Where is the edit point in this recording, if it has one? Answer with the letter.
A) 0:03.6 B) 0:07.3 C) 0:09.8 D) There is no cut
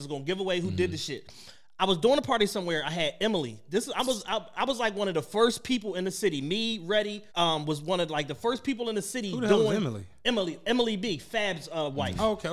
B